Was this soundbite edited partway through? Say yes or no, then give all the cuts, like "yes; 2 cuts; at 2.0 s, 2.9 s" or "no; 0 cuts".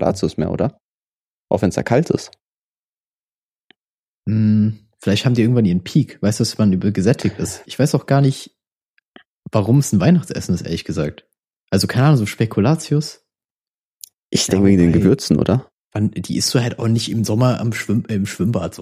yes; 1 cut; at 7.7 s